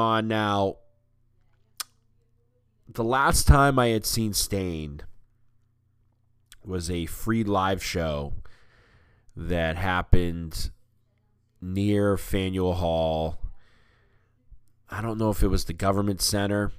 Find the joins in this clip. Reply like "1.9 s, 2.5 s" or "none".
none